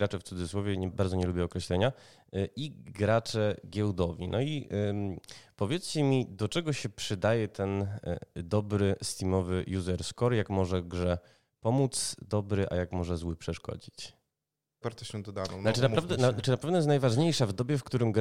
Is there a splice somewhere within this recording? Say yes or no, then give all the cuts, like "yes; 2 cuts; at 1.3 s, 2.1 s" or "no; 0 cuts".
yes; 2 cuts; at 0.9 s, 14.8 s